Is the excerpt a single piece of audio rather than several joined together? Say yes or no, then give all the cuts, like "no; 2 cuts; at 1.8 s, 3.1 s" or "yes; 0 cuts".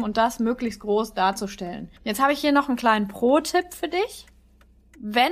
no; 1 cut; at 2.0 s